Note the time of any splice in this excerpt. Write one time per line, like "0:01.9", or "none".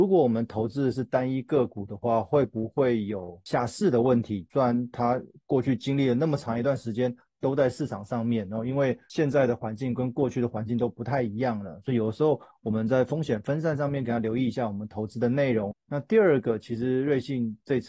0:15.7